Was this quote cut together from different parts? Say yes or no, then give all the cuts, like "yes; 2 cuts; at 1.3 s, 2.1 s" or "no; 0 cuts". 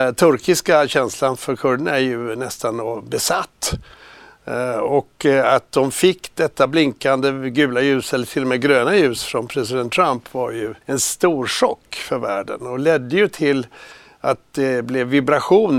yes; 1 cut; at 10.8 s